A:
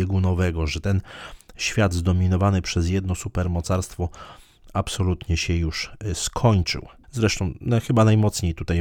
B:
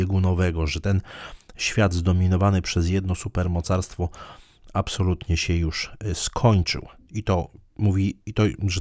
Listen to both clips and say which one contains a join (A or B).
A